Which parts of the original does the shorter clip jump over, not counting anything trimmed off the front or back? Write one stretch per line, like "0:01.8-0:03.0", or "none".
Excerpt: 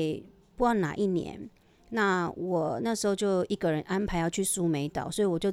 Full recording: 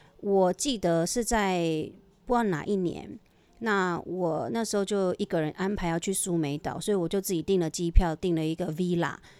none